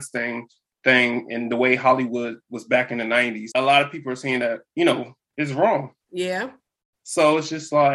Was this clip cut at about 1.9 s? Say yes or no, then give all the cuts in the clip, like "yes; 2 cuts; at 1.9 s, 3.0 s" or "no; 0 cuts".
no; 2 cuts; at 3.5 s, 6.0 s